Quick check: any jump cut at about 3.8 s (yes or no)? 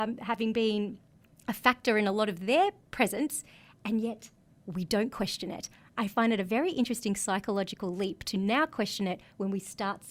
no